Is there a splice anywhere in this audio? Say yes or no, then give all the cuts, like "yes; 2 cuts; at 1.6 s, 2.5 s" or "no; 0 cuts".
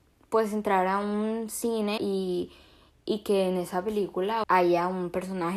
yes; 2 cuts; at 2.0 s, 4.4 s